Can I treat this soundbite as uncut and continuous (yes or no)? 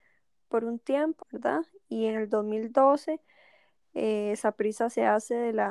no